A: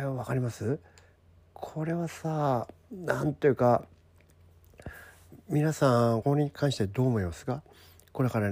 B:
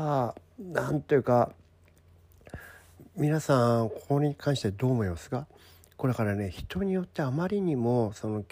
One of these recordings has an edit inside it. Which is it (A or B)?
A